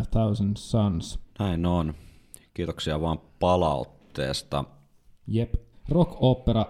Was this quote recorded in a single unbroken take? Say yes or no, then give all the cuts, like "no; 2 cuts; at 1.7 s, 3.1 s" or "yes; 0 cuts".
no; 2 cuts; at 1.3 s, 5.7 s